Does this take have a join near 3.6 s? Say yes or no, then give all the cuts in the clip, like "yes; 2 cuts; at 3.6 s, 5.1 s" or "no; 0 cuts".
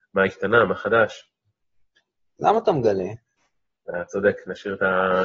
no; 1 cut; at 2.4 s